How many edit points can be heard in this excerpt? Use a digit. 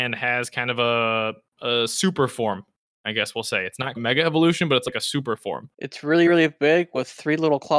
2